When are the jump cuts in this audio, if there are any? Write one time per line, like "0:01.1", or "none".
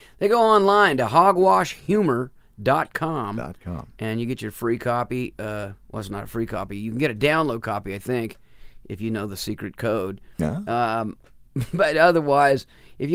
none